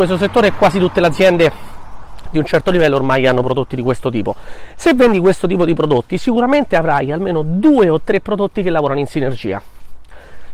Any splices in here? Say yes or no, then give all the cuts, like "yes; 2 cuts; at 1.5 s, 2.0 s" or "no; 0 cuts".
no; 0 cuts